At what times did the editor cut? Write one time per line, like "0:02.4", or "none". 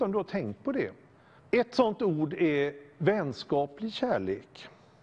0:01.4